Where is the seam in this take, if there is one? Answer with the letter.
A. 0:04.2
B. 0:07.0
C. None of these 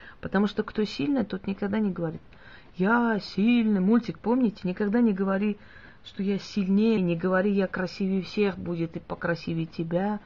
B